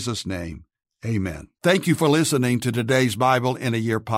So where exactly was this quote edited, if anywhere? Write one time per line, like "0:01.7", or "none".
0:01.6